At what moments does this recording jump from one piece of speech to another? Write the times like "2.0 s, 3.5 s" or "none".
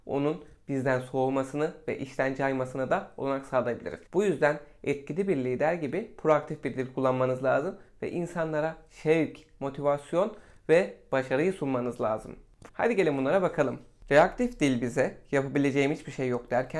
4.1 s, 12.7 s